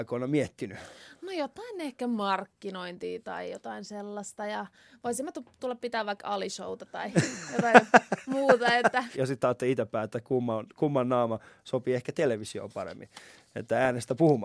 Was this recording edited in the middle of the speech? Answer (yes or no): yes